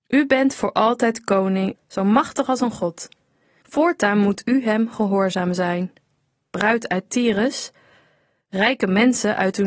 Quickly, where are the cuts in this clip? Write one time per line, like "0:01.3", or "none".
0:01.7
0:03.6